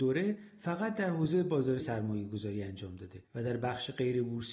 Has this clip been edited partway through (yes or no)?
yes